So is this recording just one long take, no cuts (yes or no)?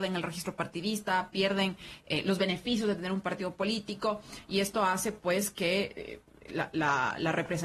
yes